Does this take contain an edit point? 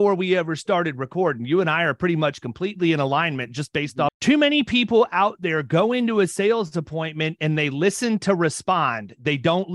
yes; 1 cut; at 4.1 s

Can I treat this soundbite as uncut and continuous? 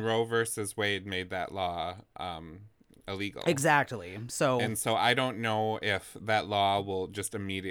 yes; 0 cuts

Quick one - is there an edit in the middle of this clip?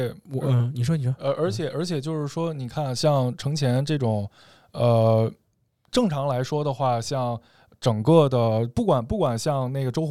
no; 0 cuts

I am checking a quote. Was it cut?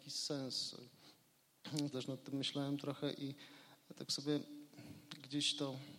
yes; 1 cut; at 1.9 s

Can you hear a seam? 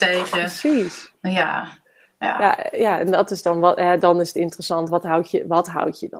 no; 0 cuts

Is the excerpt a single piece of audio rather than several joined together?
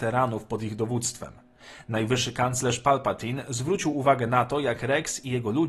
yes; 0 cuts

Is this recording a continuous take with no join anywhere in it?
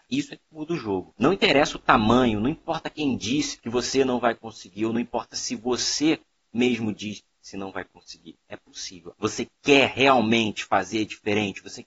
no; 2 cuts; at 1.2 s, 9.2 s

